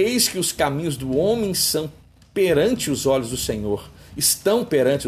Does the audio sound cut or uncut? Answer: uncut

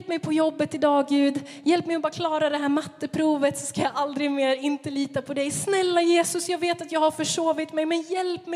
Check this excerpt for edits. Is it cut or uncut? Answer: uncut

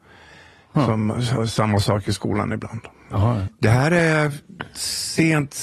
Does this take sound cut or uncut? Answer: cut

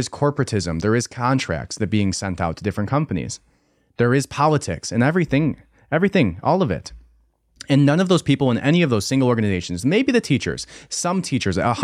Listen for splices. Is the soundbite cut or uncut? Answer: uncut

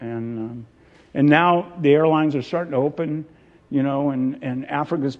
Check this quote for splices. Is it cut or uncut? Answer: uncut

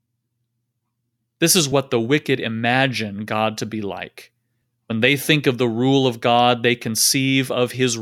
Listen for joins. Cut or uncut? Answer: uncut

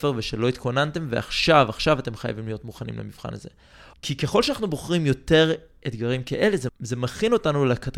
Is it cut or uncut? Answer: cut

